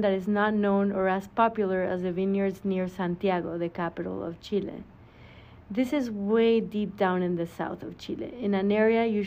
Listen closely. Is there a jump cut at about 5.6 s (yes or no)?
no